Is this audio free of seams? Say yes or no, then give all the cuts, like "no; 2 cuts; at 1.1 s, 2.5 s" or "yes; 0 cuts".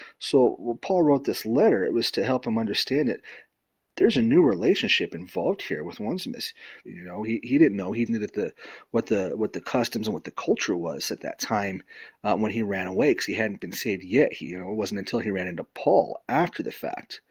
no; 2 cuts; at 6.8 s, 8.1 s